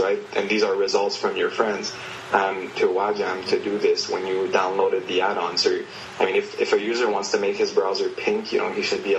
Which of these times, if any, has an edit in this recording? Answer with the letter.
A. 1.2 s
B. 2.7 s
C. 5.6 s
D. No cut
B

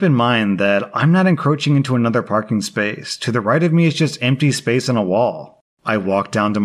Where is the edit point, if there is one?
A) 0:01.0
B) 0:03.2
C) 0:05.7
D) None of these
C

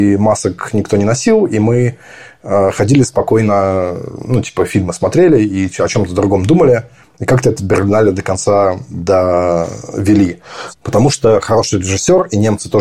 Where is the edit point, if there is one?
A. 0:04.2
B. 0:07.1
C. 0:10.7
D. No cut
C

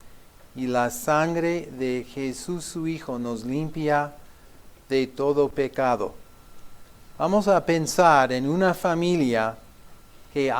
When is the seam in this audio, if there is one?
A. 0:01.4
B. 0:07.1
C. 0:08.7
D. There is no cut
B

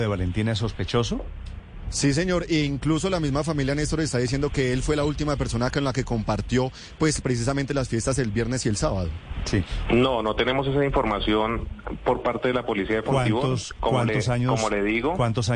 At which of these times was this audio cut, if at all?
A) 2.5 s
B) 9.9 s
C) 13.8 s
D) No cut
B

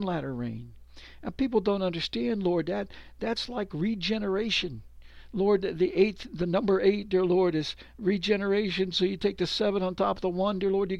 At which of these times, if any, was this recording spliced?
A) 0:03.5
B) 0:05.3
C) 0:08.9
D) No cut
D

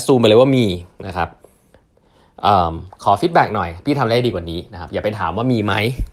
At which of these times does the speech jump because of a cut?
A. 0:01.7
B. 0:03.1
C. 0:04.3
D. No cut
D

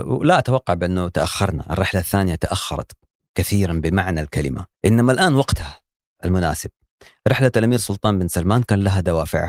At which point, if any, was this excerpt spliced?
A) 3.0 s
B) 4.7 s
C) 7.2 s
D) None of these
B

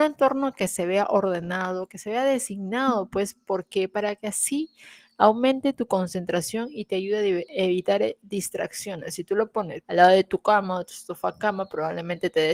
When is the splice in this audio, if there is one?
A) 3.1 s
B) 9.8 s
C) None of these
B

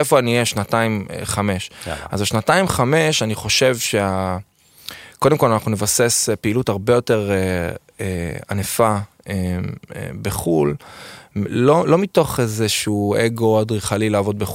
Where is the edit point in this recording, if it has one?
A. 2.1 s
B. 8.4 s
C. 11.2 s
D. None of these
D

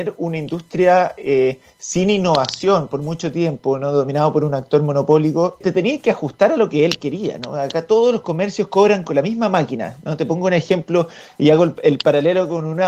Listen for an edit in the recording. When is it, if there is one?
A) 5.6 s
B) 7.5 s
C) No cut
A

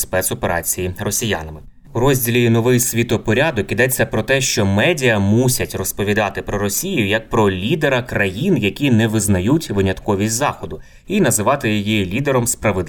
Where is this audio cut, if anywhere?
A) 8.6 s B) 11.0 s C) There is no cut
C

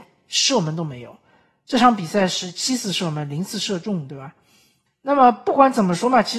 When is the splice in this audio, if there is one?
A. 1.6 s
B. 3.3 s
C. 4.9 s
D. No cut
C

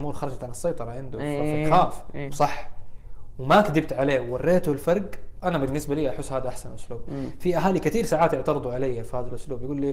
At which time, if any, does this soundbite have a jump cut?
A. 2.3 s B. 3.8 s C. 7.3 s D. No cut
A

